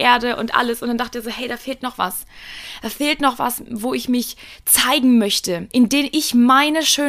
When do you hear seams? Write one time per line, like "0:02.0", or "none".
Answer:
0:05.7